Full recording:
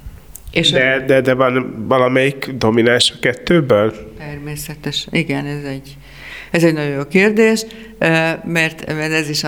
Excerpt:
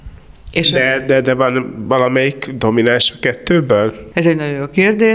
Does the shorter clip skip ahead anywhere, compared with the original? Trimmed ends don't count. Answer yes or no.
yes